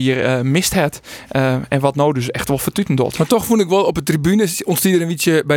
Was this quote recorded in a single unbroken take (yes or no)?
yes